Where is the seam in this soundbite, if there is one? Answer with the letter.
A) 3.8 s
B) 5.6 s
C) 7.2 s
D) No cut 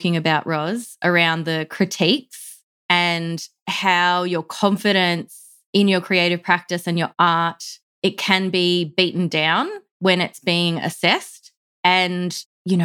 B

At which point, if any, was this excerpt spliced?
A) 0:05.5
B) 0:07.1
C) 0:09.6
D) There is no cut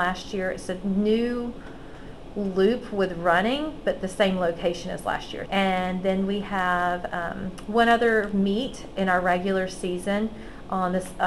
A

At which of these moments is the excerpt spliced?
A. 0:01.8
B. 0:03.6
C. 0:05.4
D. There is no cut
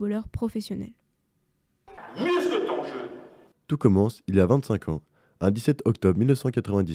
B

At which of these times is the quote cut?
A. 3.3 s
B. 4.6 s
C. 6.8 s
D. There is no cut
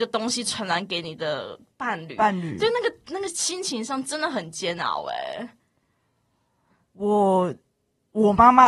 A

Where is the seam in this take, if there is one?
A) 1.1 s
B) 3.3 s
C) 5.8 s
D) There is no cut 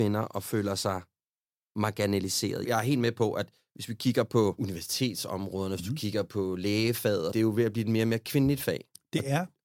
D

